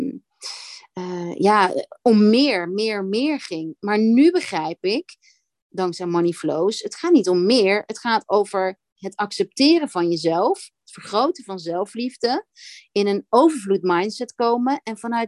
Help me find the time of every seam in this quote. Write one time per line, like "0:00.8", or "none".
none